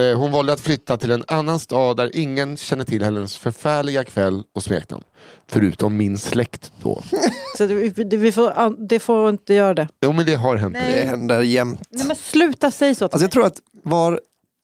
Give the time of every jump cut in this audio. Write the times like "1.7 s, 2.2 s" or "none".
7.5 s